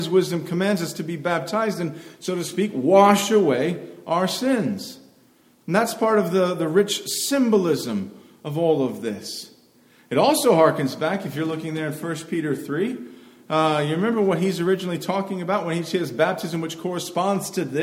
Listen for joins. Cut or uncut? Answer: uncut